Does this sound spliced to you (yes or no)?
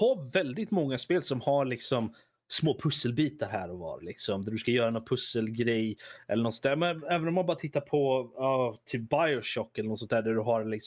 no